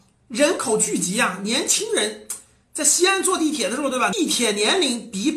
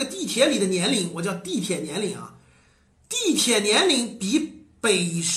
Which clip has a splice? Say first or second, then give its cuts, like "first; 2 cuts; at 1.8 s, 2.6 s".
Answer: first; 1 cut; at 4.1 s